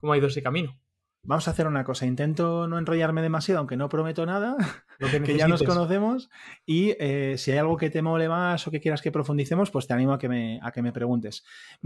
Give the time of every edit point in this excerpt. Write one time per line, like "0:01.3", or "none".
none